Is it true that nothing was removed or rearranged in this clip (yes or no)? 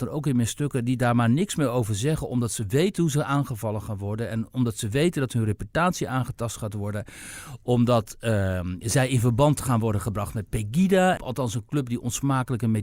no